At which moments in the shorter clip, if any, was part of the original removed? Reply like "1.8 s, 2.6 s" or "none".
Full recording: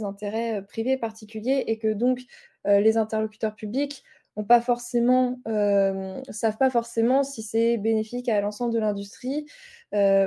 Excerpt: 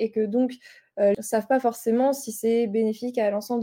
1.1 s